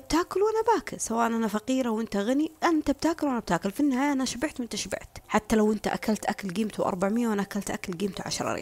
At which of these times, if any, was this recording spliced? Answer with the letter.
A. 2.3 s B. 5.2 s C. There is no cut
B